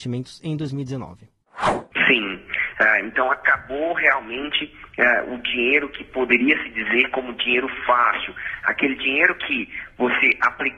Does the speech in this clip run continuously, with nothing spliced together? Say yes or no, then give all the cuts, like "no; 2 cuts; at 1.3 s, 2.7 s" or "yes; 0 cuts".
yes; 0 cuts